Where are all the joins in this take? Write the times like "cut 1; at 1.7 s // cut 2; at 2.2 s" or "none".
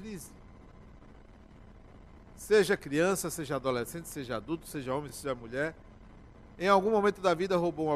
none